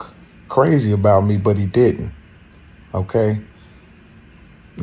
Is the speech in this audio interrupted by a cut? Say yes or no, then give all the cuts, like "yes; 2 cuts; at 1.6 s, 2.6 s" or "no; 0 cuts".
no; 0 cuts